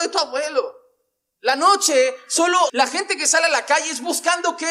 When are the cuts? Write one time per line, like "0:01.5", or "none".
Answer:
0:01.4
0:02.7